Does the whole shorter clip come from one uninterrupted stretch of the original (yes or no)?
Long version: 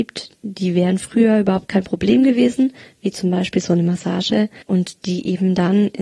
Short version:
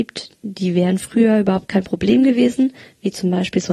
yes